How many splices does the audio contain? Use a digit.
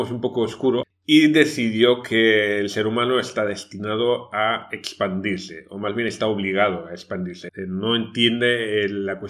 1